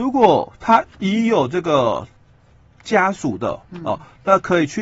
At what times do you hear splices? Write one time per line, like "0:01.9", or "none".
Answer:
none